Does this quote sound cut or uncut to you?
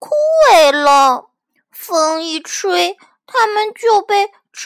uncut